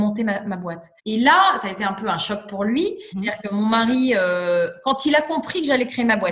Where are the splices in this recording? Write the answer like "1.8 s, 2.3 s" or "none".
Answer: 1.0 s, 3.1 s